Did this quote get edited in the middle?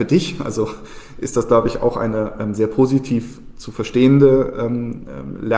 no; 0 cuts

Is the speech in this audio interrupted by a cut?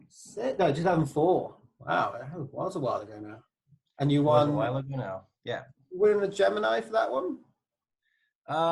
no; 0 cuts

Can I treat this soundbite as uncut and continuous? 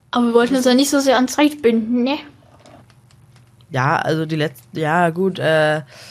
yes; 0 cuts

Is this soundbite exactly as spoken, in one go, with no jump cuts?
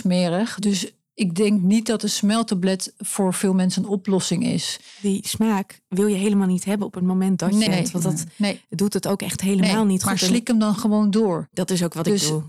no; 1 cut; at 7.7 s

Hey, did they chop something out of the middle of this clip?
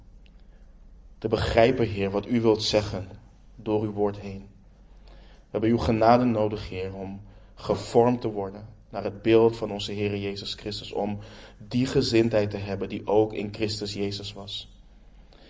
no; 0 cuts

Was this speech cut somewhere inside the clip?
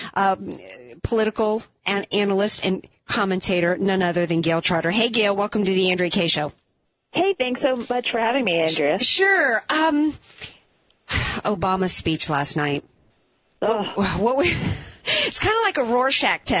no; 0 cuts

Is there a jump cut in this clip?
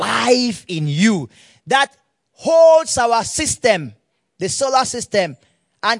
no; 0 cuts

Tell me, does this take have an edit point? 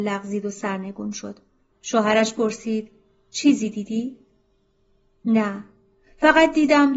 yes; 2 cuts; at 1.7 s, 5.2 s

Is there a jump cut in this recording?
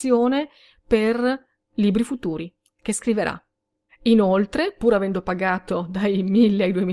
yes; 1 cut; at 3.9 s

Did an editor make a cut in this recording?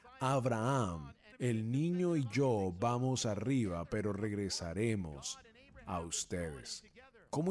yes; 1 cut; at 1.3 s

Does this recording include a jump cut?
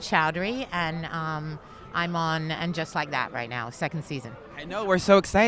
no; 0 cuts

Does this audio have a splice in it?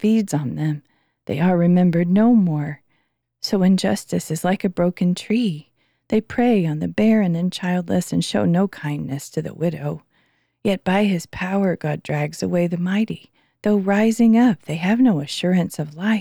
no; 0 cuts

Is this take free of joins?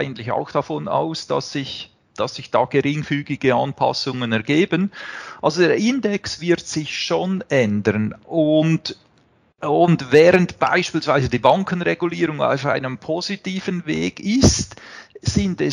yes; 0 cuts

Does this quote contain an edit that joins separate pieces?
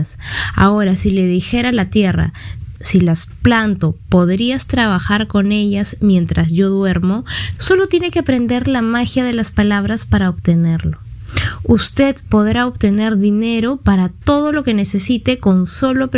yes; 2 cuts; at 2.8 s, 7.6 s

